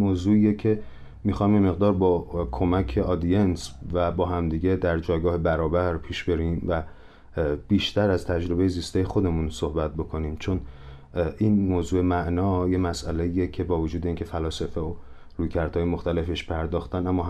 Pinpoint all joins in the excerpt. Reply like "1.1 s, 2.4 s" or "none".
11.7 s